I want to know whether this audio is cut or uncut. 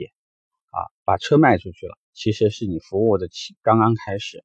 cut